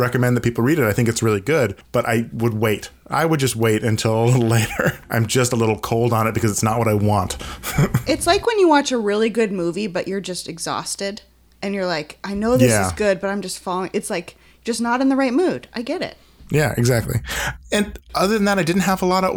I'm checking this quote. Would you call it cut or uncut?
uncut